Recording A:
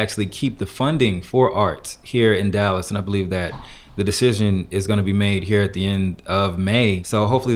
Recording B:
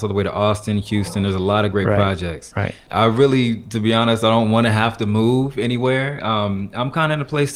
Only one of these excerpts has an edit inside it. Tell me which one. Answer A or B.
B